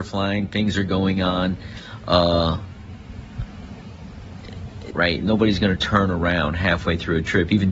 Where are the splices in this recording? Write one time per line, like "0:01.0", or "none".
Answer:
0:04.9